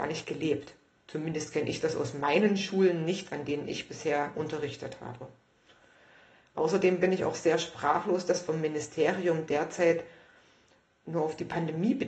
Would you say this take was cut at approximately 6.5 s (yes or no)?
no